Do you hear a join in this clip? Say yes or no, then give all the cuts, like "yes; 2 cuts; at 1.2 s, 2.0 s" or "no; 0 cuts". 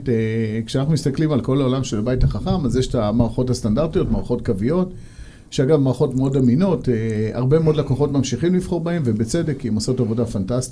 no; 0 cuts